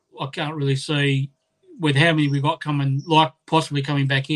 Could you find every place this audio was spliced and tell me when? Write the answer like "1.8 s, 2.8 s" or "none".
none